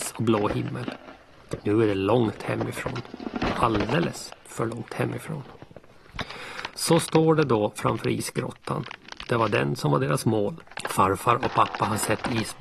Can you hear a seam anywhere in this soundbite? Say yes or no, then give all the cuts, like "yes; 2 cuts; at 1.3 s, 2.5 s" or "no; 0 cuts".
no; 0 cuts